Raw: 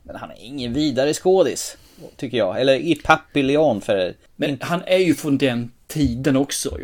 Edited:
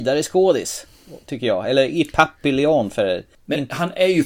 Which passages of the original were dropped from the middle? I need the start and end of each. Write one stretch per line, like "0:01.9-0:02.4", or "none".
none